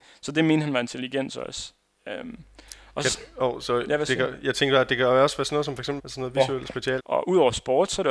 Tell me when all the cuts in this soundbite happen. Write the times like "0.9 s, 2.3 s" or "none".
6.0 s, 7.0 s